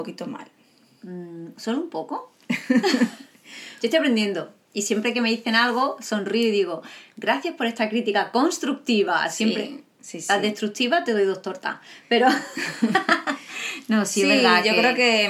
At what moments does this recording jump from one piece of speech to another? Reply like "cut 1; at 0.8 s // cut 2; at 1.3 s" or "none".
none